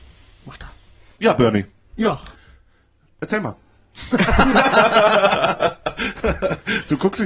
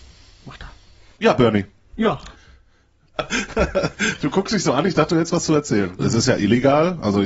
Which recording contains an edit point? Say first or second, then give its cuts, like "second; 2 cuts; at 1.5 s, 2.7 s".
second; 2 cuts; at 3.1 s, 6.0 s